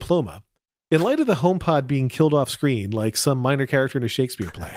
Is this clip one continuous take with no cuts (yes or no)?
yes